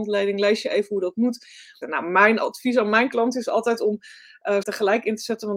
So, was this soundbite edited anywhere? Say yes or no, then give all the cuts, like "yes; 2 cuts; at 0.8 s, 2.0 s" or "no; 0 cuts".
yes; 2 cuts; at 1.8 s, 4.6 s